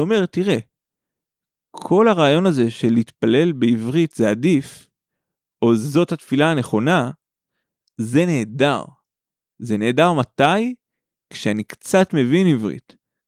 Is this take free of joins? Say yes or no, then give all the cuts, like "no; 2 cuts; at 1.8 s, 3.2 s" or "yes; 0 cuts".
yes; 0 cuts